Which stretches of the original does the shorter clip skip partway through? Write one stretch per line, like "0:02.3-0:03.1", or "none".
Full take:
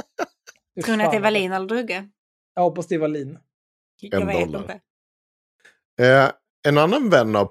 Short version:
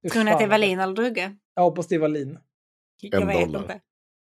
0:02.2-0:02.4